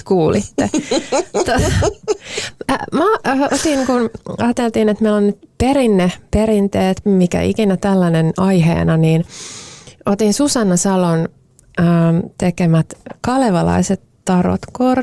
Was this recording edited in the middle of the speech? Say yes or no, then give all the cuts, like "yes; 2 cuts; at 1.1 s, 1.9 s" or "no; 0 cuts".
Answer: yes; 1 cut; at 7.0 s